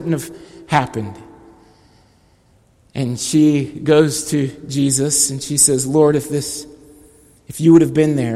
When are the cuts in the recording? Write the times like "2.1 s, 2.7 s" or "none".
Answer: none